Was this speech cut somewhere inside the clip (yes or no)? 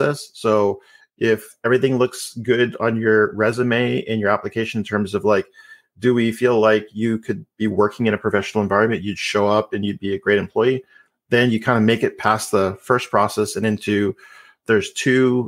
no